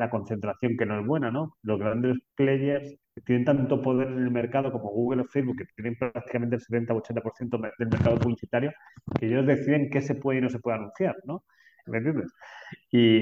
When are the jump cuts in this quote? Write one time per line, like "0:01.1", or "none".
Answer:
0:11.8